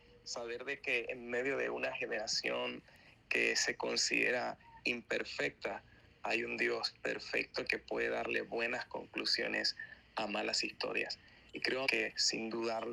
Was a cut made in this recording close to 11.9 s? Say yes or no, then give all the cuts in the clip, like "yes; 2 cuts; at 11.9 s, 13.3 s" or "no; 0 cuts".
yes; 1 cut; at 11.9 s